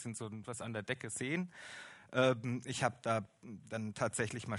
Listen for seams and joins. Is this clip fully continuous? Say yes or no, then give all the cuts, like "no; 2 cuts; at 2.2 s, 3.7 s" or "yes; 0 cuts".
yes; 0 cuts